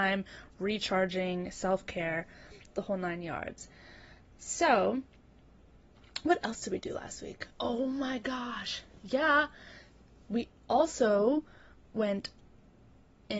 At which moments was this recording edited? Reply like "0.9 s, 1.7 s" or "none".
none